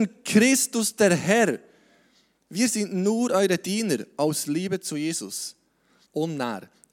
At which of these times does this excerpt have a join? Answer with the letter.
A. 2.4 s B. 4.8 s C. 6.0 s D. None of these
C